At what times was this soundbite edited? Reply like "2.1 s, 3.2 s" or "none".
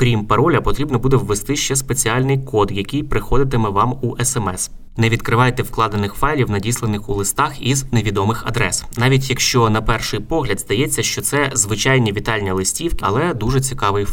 5.0 s, 13.0 s